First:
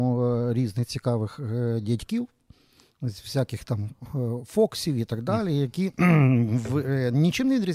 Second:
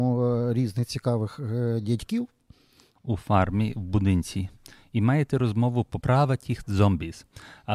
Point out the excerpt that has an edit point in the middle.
second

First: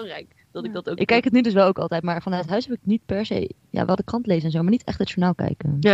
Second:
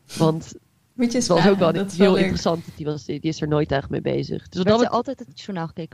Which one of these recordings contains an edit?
second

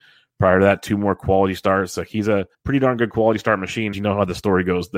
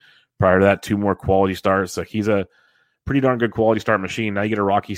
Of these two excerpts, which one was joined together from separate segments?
first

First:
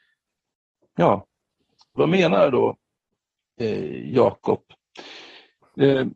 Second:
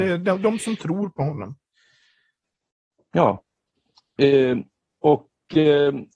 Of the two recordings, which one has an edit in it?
first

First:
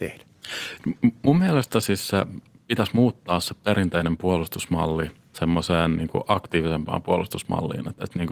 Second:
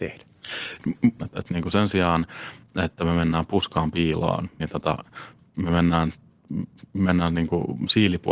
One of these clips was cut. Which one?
second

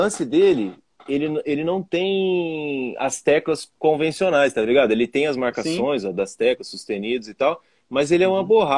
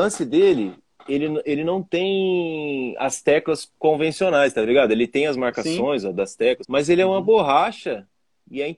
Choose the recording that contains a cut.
second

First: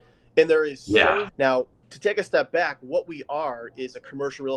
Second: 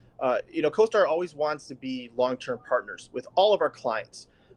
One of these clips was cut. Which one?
first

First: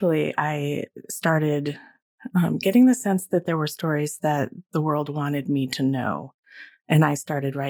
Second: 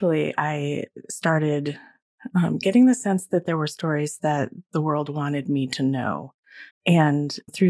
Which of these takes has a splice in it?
second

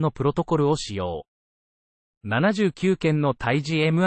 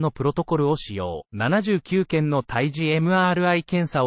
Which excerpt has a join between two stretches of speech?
second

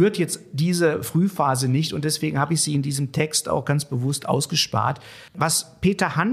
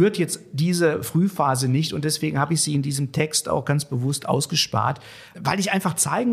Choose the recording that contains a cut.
first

